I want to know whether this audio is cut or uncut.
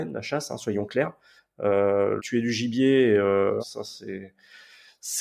cut